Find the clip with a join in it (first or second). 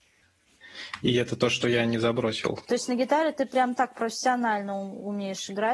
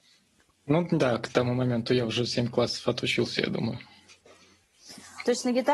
first